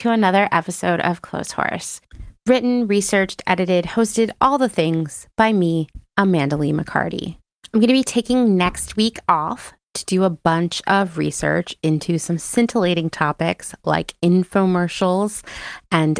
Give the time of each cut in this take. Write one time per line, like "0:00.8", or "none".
none